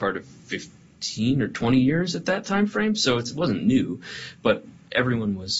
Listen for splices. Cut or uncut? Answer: uncut